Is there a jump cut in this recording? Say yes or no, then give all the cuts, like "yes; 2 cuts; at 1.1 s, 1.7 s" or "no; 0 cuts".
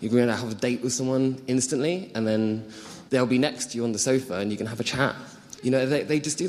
yes; 2 cuts; at 3.1 s, 5.6 s